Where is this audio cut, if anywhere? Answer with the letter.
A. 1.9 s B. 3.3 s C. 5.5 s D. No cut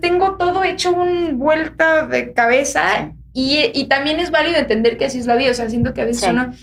D